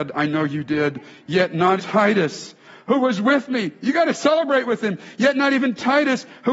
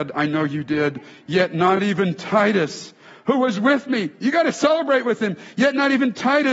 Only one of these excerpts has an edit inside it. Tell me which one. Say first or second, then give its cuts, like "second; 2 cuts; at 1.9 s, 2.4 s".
first; 1 cut; at 1.8 s